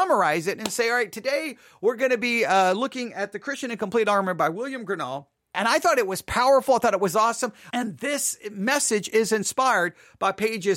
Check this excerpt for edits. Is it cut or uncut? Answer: cut